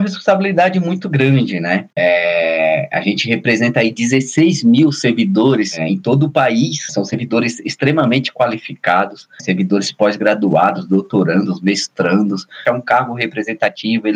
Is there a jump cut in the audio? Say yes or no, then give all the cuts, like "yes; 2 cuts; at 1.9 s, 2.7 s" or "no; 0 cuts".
no; 0 cuts